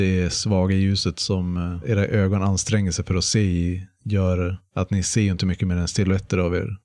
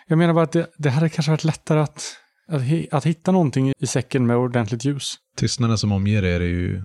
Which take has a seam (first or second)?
second